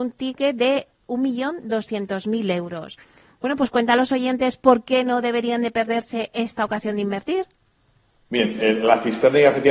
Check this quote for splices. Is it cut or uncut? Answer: uncut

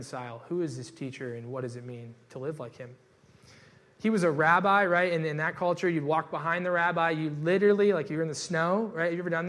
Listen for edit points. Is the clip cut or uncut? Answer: uncut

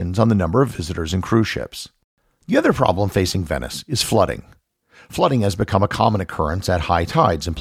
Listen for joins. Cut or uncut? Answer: uncut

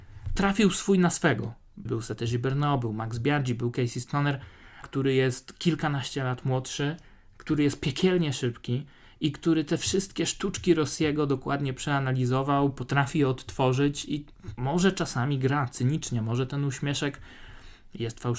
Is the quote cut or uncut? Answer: cut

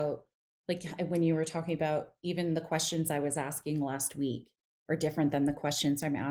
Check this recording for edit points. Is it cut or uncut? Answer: uncut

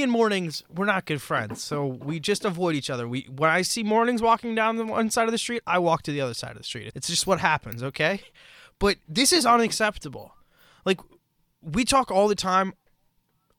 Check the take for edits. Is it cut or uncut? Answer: cut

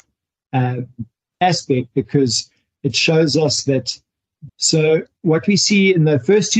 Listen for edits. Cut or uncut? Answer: cut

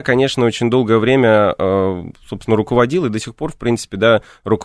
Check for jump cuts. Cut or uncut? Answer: uncut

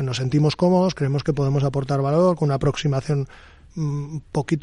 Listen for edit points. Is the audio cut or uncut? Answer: cut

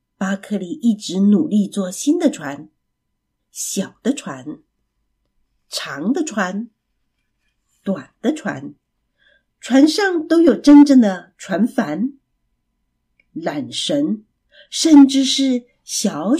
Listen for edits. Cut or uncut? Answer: cut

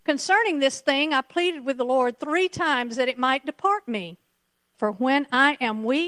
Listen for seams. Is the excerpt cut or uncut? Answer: cut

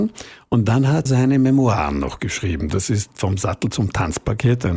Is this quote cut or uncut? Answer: cut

